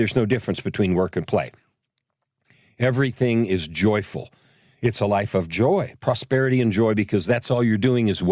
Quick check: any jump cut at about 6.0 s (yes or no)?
yes